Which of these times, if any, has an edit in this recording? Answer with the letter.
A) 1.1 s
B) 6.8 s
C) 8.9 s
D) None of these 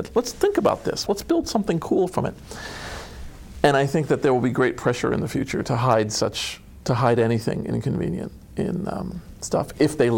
A